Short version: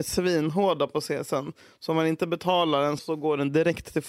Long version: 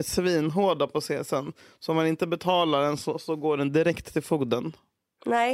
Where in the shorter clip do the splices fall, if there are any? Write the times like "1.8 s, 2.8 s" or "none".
3.0 s